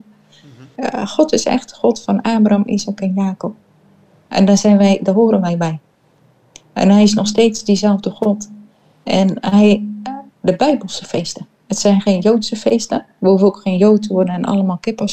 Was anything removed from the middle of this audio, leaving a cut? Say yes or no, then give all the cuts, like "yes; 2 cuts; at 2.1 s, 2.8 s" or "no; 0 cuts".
yes; 1 cut; at 10.3 s